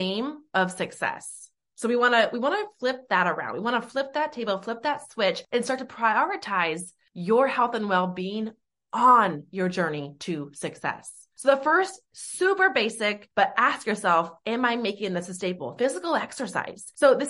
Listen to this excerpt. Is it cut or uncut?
uncut